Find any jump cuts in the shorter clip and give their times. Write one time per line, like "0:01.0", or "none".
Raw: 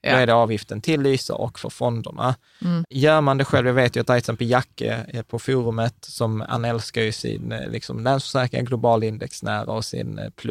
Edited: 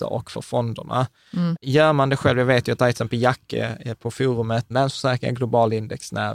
0:04.7